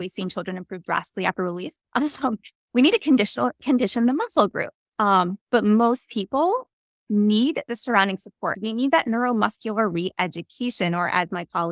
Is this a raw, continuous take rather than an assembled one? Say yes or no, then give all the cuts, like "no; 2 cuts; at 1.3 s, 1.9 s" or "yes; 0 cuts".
no; 3 cuts; at 1.8 s, 4.9 s, 8.5 s